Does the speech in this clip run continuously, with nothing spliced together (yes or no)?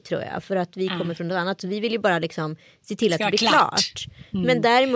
yes